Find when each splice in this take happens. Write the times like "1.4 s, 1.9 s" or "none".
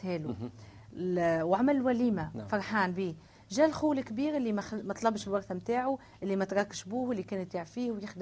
none